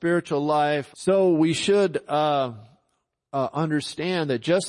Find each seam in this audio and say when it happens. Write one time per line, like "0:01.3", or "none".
0:00.9